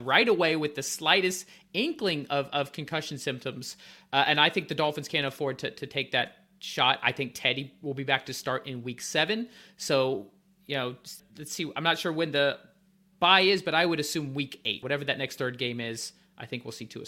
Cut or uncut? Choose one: cut